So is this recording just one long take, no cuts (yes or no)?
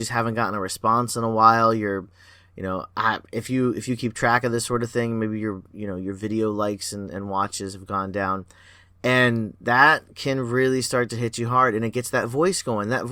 yes